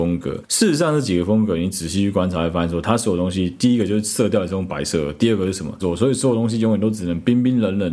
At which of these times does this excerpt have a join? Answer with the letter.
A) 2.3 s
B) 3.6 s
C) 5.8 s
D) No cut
C